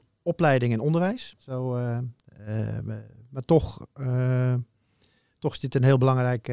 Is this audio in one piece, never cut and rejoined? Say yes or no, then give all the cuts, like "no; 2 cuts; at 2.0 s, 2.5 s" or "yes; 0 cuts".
no; 1 cut; at 1.4 s